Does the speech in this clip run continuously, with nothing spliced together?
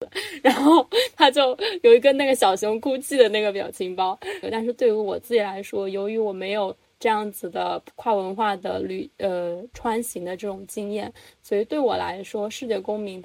no; 1 cut; at 4.4 s

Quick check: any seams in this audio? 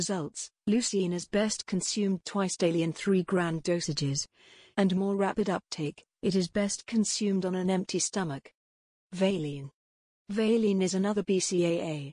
no; 0 cuts

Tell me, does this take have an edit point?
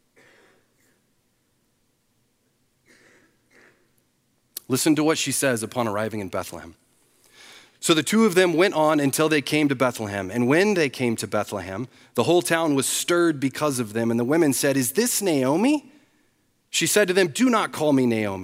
no; 0 cuts

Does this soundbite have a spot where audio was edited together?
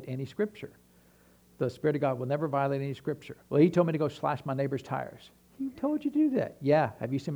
yes; 2 cuts; at 3.4 s, 5.7 s

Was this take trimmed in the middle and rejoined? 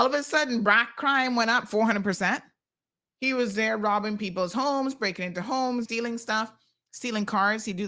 yes; 1 cut; at 5.8 s

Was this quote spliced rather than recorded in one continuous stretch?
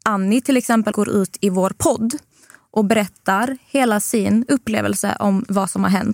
yes; 1 cut; at 0.9 s

